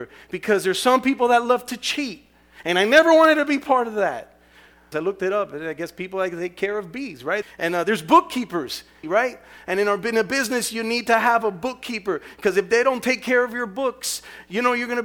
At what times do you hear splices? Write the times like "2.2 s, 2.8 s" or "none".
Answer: 4.9 s, 7.4 s, 9.0 s